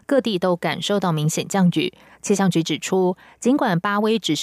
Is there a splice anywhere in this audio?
no; 0 cuts

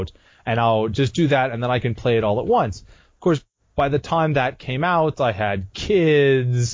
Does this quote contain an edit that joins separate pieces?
no; 0 cuts

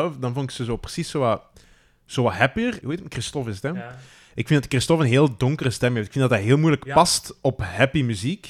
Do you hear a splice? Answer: yes; 1 cut; at 2.8 s

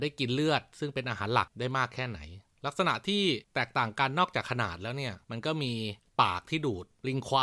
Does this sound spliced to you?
no; 0 cuts

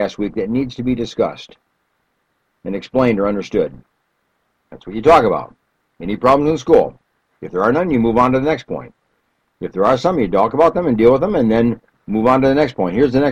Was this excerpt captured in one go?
yes; 0 cuts

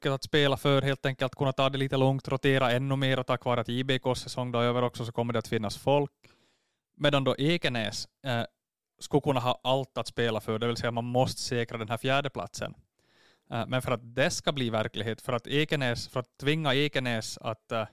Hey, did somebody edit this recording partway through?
no; 0 cuts

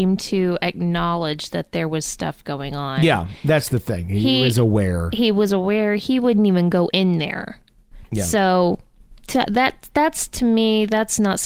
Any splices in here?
no; 0 cuts

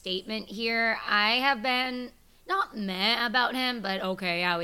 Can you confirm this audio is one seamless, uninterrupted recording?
yes; 0 cuts

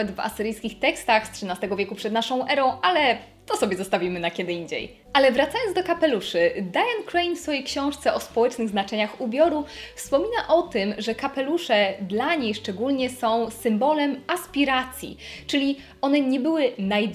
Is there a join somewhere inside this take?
no; 0 cuts

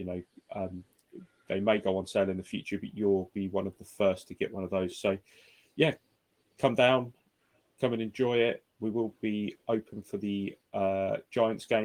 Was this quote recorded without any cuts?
yes; 0 cuts

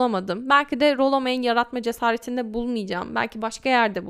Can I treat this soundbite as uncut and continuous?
yes; 0 cuts

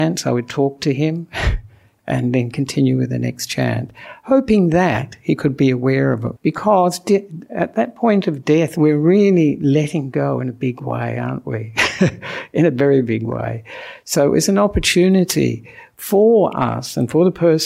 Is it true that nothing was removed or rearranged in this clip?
no; 1 cut; at 6.4 s

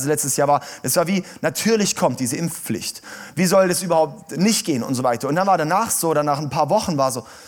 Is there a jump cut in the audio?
no; 0 cuts

